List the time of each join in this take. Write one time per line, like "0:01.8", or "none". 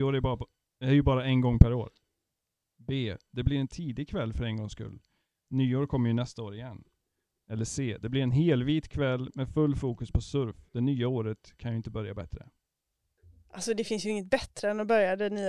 none